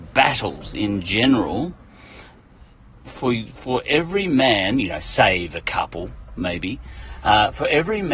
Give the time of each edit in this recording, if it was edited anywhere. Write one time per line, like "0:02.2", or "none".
none